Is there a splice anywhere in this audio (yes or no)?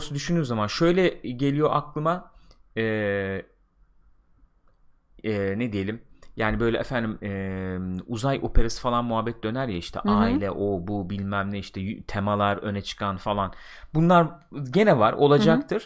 no